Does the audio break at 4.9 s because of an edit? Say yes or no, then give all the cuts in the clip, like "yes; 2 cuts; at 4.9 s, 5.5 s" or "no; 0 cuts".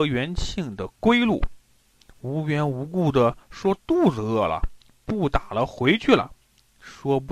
no; 1 cut; at 1.9 s